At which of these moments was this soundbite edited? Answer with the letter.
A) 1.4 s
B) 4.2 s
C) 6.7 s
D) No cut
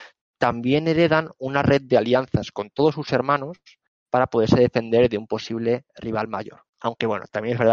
C